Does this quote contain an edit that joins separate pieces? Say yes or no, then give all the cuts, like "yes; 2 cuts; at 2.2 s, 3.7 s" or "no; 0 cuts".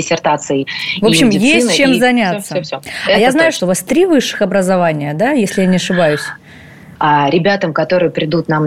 yes; 2 cuts; at 3.6 s, 7.0 s